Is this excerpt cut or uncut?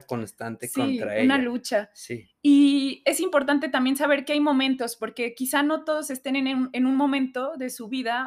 uncut